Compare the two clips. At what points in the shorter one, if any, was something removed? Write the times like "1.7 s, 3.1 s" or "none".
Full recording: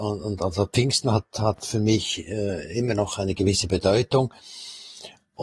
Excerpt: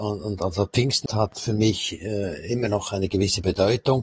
1.1 s